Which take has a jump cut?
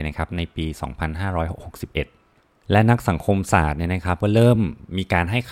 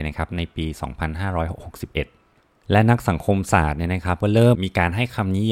second; 1 cut; at 4.5 s

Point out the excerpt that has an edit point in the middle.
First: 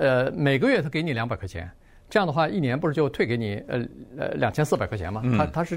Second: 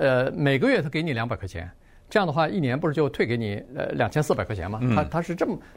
second; 1 cut; at 3.7 s

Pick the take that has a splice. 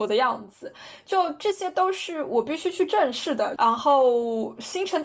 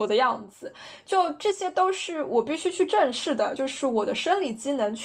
first; 1 cut; at 3.6 s

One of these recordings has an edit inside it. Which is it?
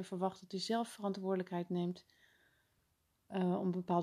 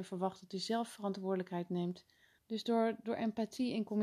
second; 1 cut; at 2.4 s

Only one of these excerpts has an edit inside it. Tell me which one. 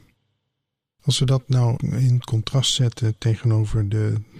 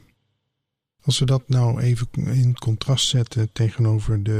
first; 1 cut; at 1.8 s

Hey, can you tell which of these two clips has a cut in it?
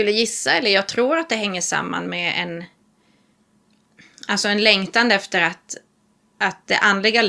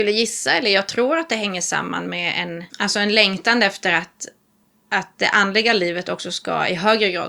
second; 1 cut; at 2.7 s

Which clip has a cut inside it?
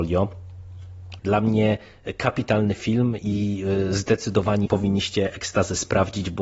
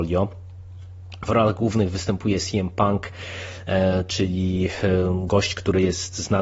first; 2 cuts; at 1.2 s, 4.7 s

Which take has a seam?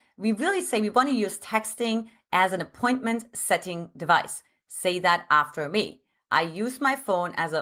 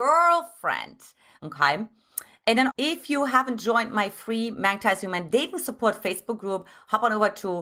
second; 2 cuts; at 1.4 s, 2.7 s

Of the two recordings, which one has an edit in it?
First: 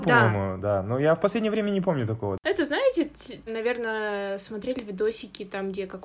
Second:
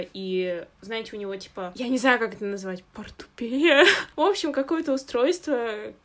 first; 1 cut; at 3.5 s

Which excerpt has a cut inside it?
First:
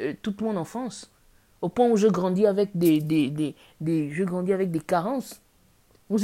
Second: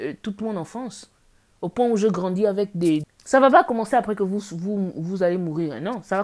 second; 1 cut; at 3.0 s

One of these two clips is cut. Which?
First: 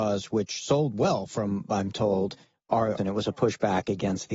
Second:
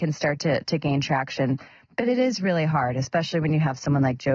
first; 1 cut; at 3.0 s

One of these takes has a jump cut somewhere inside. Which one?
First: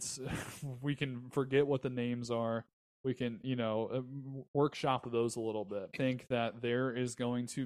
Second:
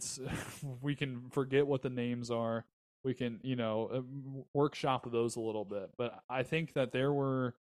first; 1 cut; at 5.9 s

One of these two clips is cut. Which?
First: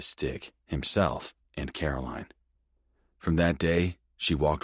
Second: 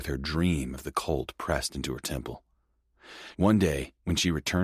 second; 1 cut; at 3.3 s

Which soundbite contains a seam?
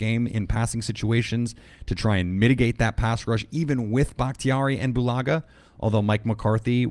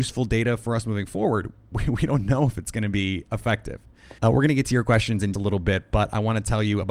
second; 2 cuts; at 4.2 s, 5.3 s

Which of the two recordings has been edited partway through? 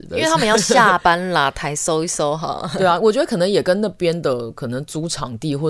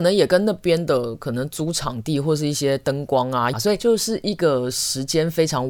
second; 1 cut; at 3.5 s

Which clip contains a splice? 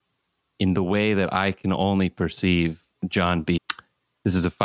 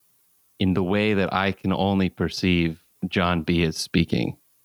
first; 1 cut; at 3.6 s

